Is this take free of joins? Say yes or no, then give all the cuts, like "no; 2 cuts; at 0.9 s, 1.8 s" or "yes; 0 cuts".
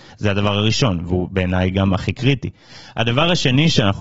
yes; 0 cuts